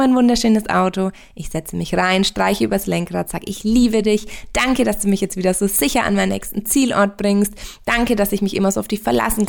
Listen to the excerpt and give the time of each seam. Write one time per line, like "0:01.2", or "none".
none

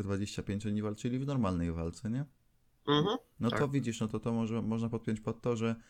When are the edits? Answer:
none

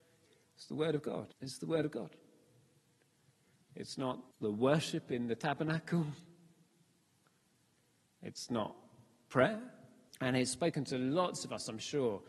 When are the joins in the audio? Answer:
0:01.3
0:04.3
0:10.1

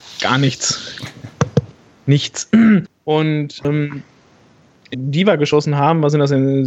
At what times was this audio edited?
0:02.8
0:04.9

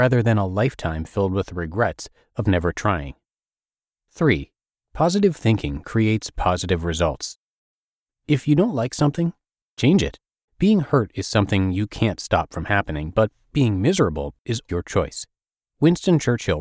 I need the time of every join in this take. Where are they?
0:10.5
0:14.7

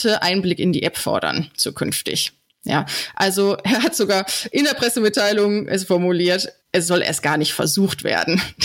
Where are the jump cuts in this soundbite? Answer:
0:06.6

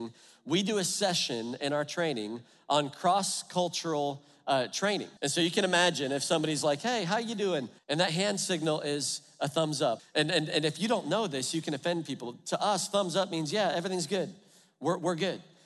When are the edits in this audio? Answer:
0:05.2
0:07.8
0:10.0

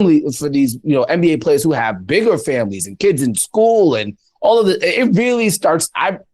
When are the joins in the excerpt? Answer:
none

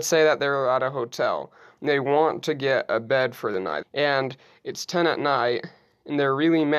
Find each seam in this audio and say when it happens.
0:03.8

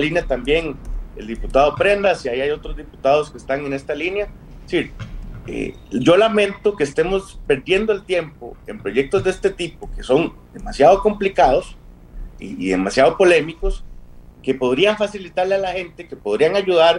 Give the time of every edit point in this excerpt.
0:12.4
0:14.3

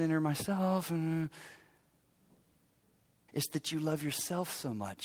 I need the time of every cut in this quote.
0:03.3

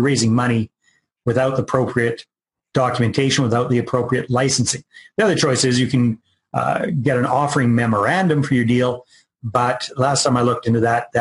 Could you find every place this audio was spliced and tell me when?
none

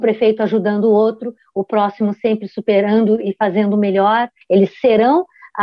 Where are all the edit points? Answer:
0:04.4

